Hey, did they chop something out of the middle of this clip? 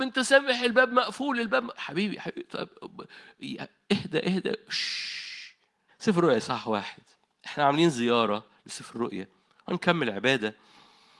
yes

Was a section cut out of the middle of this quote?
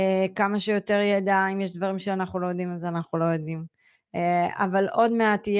no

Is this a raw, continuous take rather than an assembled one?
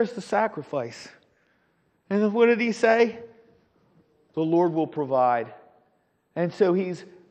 yes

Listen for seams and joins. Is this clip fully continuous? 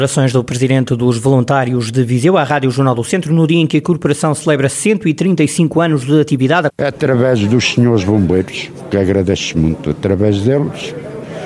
no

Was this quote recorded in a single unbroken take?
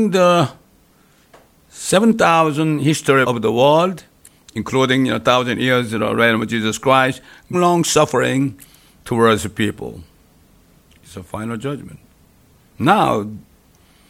no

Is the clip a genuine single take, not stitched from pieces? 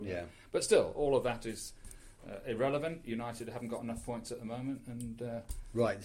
yes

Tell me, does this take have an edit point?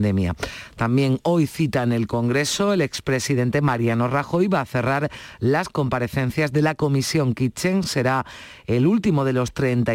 no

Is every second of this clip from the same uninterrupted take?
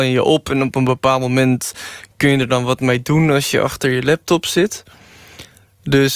yes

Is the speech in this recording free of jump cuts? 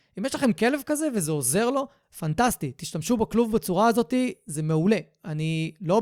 yes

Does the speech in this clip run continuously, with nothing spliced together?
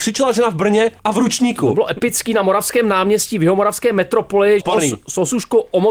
no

